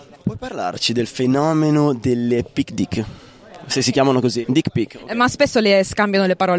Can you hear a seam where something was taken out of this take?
yes; 1 cut; at 4.4 s

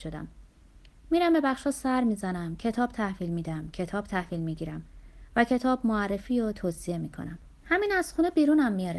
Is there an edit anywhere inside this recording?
yes; 1 cut; at 7.6 s

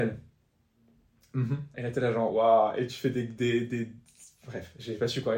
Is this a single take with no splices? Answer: no; 1 cut; at 1.7 s

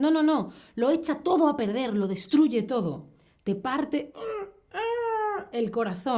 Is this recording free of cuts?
yes; 0 cuts

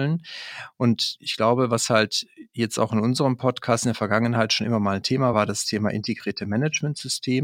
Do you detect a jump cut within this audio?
yes; 1 cut; at 5.3 s

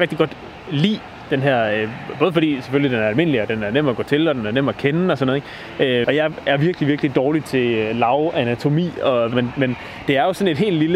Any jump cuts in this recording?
yes; 2 cuts; at 6.0 s, 9.3 s

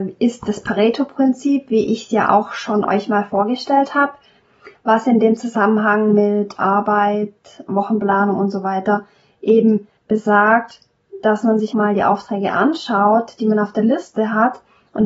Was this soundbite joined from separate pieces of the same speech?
yes; 3 cuts; at 7.7 s, 10.0 s, 11.7 s

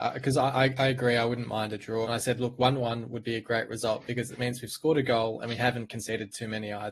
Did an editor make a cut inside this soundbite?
yes; 1 cut; at 2.0 s

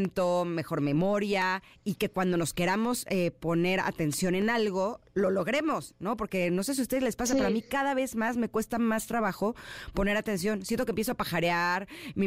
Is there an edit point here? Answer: no; 0 cuts

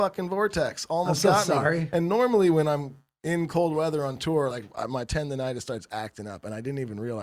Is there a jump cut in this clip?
no; 0 cuts

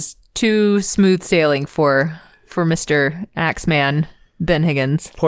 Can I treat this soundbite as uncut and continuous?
yes; 0 cuts

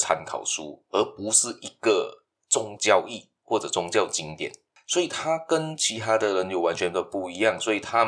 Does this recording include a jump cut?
yes; 1 cut; at 2.8 s

